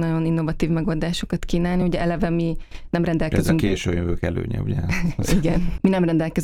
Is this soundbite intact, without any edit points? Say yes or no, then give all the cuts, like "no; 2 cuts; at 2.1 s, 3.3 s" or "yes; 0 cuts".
yes; 0 cuts